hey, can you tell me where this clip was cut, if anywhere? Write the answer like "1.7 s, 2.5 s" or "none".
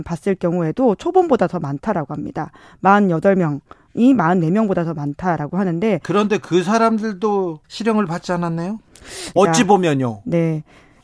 7.6 s, 9.4 s

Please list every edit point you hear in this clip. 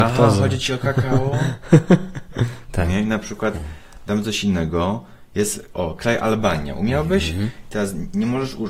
none

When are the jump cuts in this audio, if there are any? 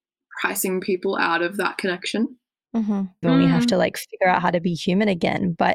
3.2 s

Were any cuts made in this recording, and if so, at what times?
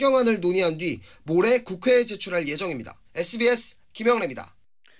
3.0 s

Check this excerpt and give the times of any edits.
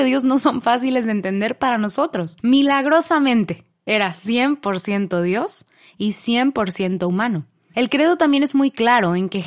2.4 s

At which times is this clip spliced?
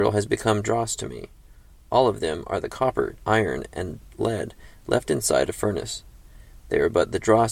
3.2 s

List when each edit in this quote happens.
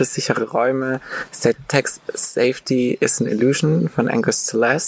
none

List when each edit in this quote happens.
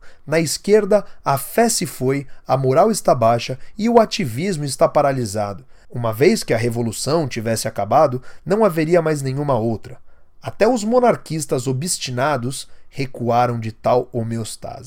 5.8 s

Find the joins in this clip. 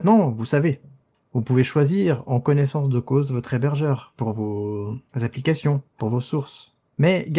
none

